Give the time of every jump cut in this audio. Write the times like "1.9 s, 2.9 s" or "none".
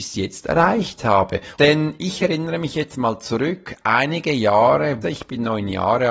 1.5 s, 5.0 s